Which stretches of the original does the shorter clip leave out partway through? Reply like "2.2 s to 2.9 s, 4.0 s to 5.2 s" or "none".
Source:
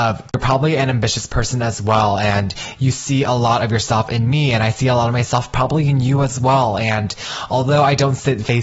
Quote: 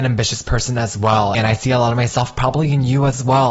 2.2 s to 4.5 s